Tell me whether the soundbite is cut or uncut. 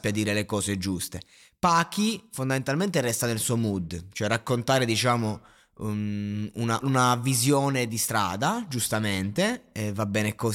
cut